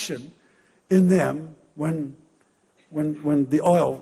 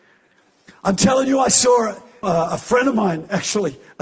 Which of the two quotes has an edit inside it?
second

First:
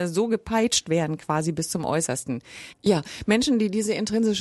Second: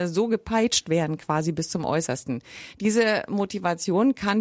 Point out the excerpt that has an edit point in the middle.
first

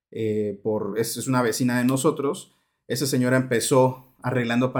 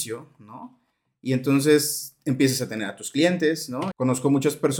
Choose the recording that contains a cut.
second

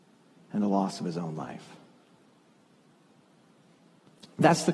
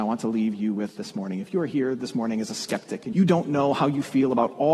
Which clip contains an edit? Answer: second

